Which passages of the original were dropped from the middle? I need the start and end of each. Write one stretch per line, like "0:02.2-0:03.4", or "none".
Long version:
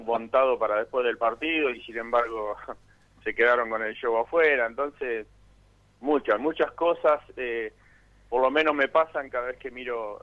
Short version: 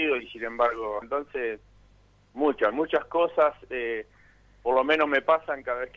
0:02.6-0:04.7